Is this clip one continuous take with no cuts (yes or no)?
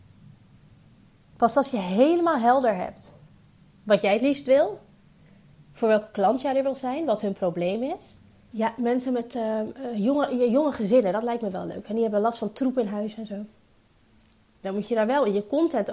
no